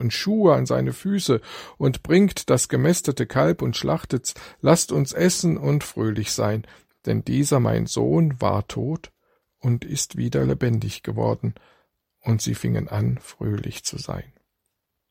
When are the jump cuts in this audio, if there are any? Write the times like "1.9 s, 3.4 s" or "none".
none